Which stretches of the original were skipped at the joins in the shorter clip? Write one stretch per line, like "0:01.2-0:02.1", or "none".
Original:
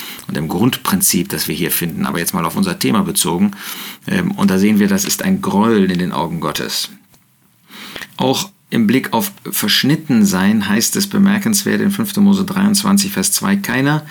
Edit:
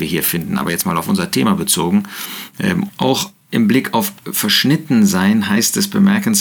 0:04.4-0:08.1